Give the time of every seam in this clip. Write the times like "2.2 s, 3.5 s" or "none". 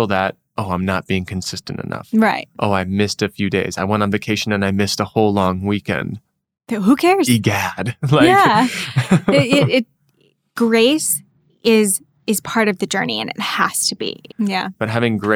14.3 s